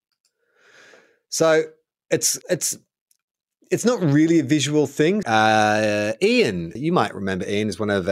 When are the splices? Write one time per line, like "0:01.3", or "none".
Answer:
0:02.4
0:05.2
0:06.8